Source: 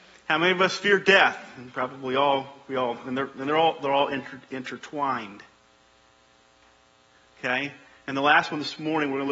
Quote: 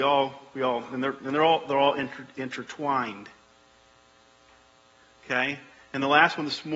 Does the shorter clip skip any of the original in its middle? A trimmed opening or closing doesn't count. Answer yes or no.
no